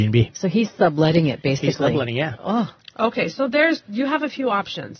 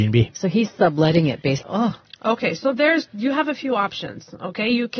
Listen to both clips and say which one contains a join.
second; 1 cut; at 1.6 s

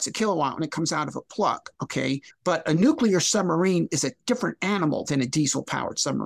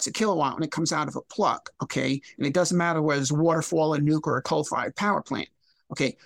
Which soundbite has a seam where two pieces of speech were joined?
first; 1 cut; at 2.3 s

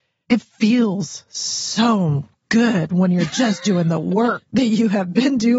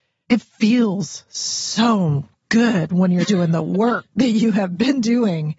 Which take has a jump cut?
second; 1 cut; at 3.2 s

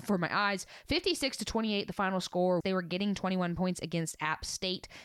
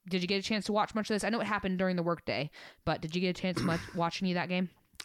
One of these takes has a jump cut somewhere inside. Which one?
first; 1 cut; at 2.6 s

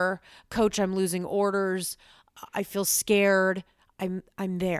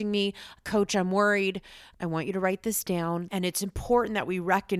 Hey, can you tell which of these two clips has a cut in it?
second; 2 cuts; at 1.9 s, 3.3 s

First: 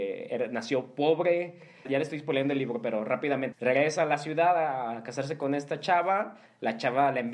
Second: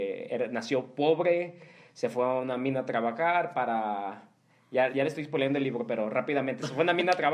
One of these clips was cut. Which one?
first; 2 cuts; at 1.9 s, 3.5 s

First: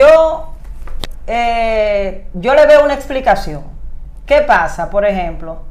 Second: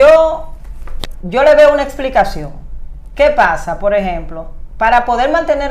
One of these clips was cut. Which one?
second; 1 cut; at 1.2 s

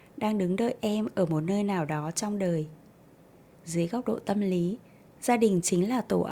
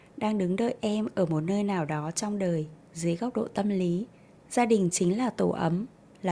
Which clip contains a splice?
second; 1 cut; at 2.8 s

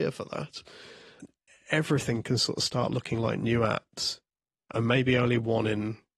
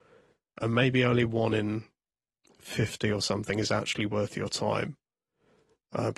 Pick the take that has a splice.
first; 1 cut; at 4.6 s

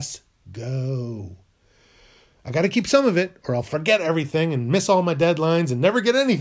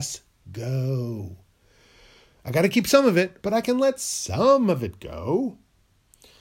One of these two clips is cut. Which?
second; 1 cut; at 3.4 s

